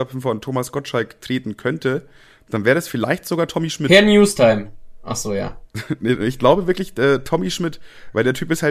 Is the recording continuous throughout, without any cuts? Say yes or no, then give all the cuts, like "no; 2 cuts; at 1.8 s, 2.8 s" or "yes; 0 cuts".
yes; 0 cuts